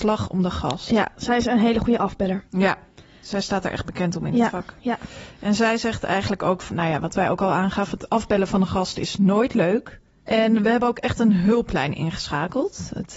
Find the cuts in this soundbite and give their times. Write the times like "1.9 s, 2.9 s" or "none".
6.7 s, 10.3 s